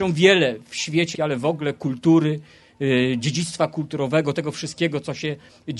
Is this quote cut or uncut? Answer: cut